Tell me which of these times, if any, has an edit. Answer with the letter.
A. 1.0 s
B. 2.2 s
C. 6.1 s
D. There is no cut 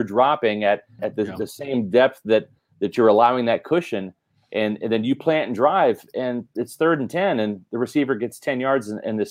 A